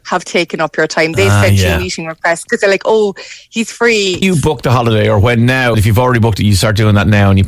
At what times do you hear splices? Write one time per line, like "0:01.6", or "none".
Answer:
0:04.2
0:05.7